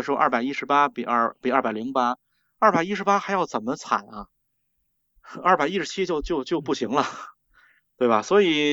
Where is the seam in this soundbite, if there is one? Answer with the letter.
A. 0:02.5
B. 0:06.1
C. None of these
C